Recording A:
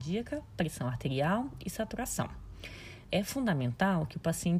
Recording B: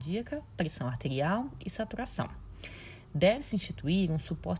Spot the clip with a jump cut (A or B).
A